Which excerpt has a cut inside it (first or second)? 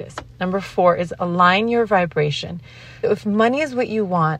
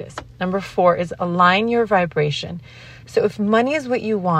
first